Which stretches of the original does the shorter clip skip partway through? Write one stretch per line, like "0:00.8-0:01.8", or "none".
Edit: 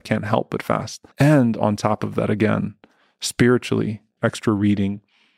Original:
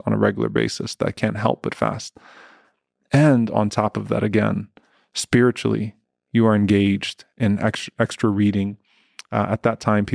0:02.2-0:03.0
0:06.1-0:07.9